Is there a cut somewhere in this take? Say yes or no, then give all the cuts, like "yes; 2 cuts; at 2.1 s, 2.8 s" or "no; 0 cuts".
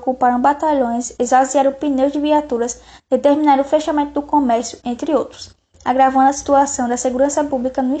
no; 0 cuts